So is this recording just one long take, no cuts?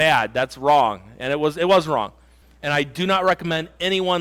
no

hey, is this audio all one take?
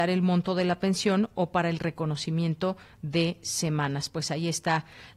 yes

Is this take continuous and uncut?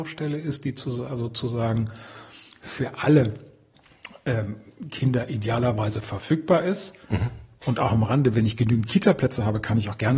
yes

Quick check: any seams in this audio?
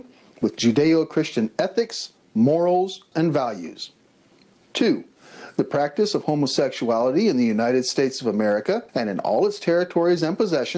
yes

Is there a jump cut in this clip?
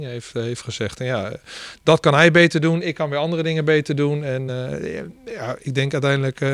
no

